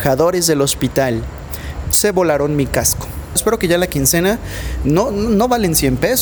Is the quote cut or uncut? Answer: cut